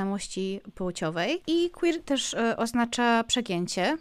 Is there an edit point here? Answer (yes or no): yes